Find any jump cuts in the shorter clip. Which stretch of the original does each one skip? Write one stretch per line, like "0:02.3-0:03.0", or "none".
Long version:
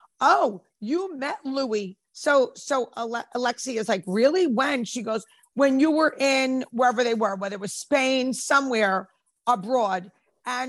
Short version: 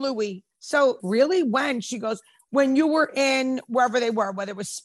0:02.5-0:04.0

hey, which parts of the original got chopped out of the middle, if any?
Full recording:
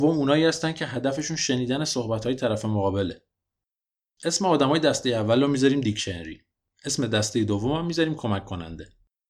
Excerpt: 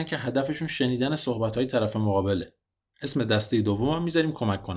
0:03.6-0:06.8

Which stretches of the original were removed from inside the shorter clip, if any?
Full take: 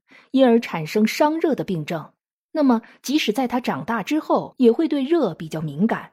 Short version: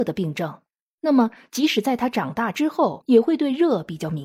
none

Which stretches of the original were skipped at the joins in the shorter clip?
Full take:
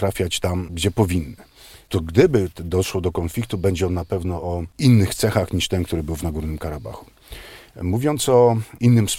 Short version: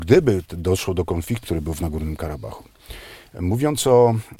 0:03.5-0:05.8

